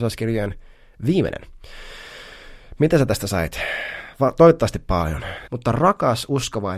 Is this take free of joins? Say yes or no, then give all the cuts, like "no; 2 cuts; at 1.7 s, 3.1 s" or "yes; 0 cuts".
no; 1 cut; at 5.5 s